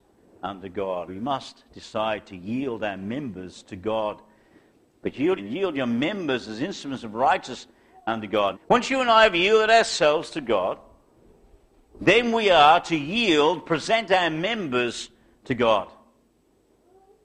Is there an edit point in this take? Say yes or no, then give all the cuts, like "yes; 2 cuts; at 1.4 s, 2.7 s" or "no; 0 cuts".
yes; 3 cuts; at 1.1 s, 5.4 s, 8.5 s